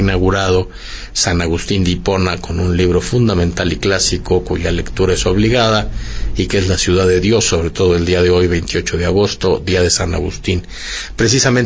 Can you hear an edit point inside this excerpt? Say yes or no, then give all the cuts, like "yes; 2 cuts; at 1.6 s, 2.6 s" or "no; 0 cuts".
no; 0 cuts